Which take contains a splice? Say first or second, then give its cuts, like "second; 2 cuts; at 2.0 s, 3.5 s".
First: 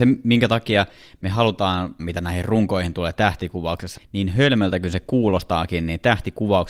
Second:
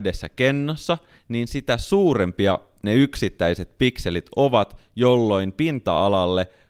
first; 2 cuts; at 2.0 s, 4.0 s